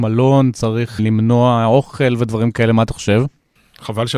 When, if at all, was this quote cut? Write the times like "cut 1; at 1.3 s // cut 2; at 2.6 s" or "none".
cut 1; at 1.0 s